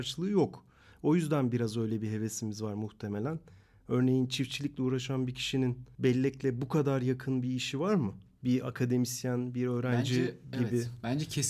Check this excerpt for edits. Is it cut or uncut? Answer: uncut